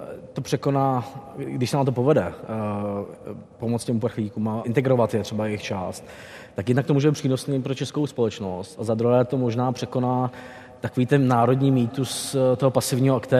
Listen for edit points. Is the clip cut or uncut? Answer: cut